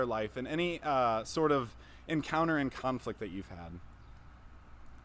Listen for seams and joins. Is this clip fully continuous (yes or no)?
yes